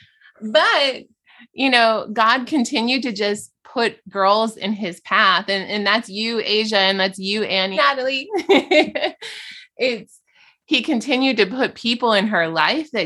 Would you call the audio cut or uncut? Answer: cut